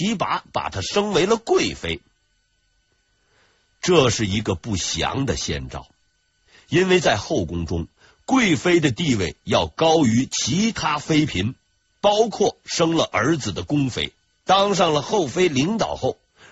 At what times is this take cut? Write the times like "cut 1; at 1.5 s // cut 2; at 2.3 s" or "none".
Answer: cut 1; at 14.4 s